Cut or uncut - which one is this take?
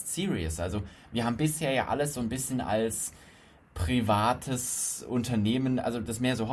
uncut